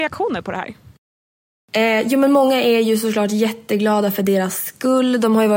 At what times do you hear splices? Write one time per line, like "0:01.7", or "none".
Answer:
none